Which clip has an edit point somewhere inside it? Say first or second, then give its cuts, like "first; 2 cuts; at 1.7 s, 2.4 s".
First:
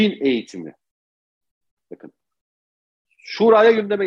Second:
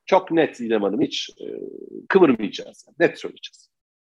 second; 1 cut; at 2.1 s